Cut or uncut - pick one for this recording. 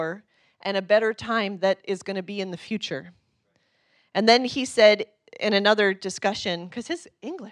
uncut